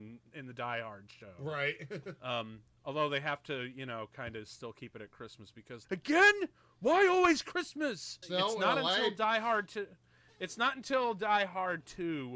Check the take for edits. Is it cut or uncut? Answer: cut